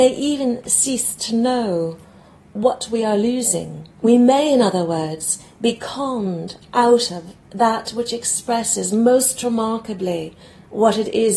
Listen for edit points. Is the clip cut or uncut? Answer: cut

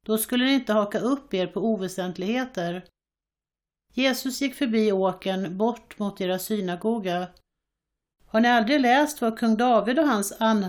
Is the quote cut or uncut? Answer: cut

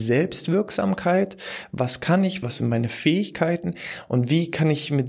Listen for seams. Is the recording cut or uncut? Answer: cut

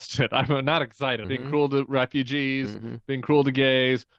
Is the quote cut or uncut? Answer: cut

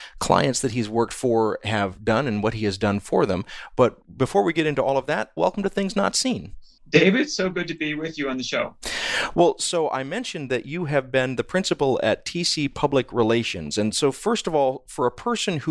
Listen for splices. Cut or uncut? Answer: cut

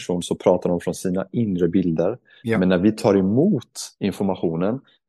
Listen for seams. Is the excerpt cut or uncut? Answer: uncut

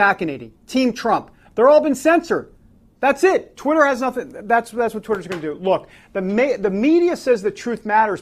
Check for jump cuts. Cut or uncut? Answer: uncut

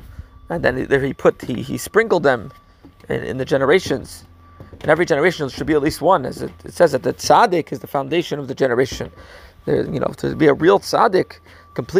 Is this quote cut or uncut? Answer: uncut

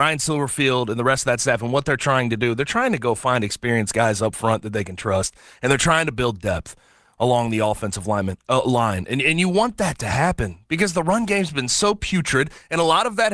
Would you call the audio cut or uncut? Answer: uncut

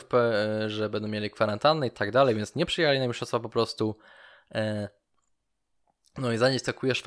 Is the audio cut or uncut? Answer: uncut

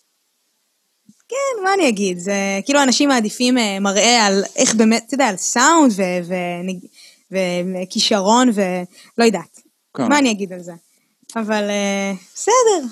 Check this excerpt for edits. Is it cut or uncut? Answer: uncut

